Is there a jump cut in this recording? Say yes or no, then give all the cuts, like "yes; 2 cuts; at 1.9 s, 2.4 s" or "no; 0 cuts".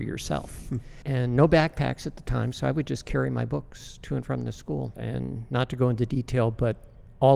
yes; 2 cuts; at 1.0 s, 4.9 s